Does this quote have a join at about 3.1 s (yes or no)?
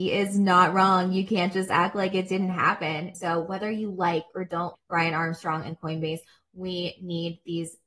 yes